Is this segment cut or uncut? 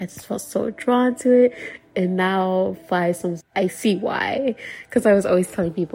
cut